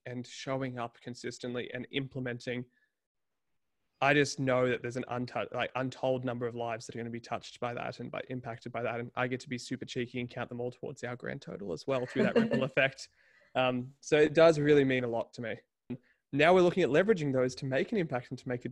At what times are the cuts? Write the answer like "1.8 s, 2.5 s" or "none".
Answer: 15.9 s